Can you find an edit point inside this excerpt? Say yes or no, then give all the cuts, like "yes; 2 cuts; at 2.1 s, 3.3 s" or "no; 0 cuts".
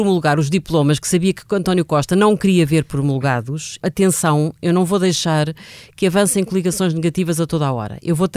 yes; 1 cut; at 3.8 s